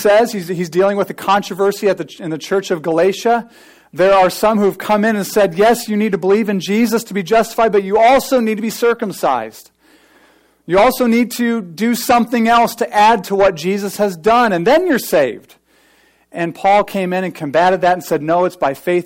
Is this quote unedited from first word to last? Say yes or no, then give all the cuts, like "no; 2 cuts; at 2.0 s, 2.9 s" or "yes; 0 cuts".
yes; 0 cuts